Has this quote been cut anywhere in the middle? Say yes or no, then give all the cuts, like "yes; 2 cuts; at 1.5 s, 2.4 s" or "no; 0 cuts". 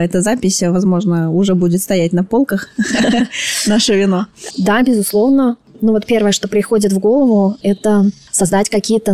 yes; 1 cut; at 4.5 s